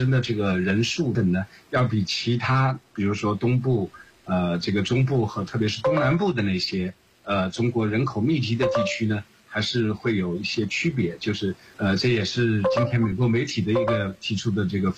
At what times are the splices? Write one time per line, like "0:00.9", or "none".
0:01.1

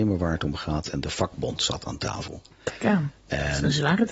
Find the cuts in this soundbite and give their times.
none

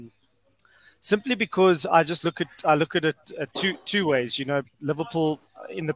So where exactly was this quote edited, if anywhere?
none

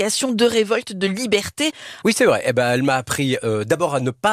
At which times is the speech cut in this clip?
0:02.0

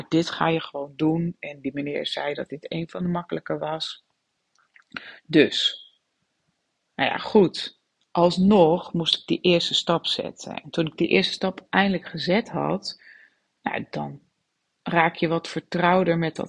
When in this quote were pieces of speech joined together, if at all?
none

